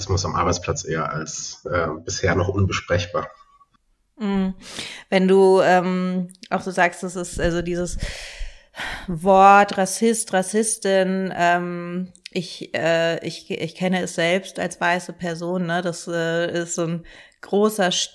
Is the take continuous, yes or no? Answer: yes